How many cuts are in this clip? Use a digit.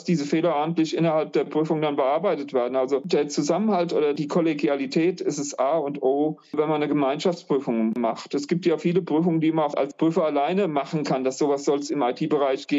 0